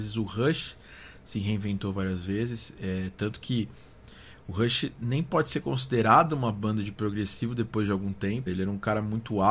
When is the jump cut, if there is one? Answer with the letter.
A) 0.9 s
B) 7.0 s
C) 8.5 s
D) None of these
C